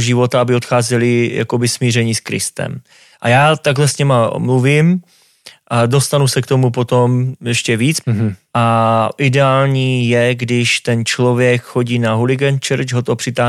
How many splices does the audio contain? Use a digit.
1